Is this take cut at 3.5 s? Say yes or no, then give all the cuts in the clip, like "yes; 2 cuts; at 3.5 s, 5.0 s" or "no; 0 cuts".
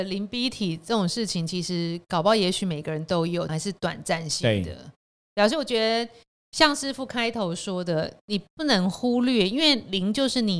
yes; 1 cut; at 3.5 s